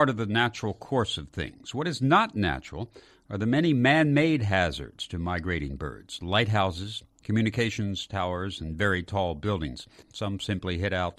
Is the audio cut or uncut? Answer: cut